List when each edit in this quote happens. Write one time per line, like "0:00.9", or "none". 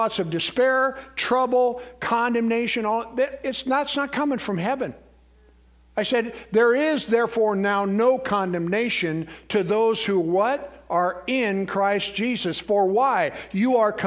none